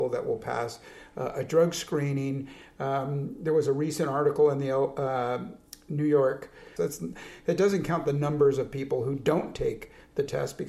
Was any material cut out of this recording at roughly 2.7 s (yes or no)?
no